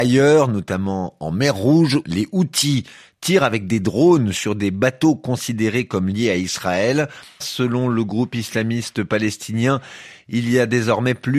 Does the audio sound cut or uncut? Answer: cut